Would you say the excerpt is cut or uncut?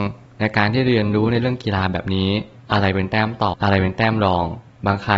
cut